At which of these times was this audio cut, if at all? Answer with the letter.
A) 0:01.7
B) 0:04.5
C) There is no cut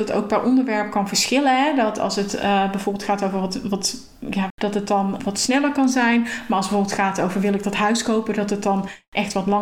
B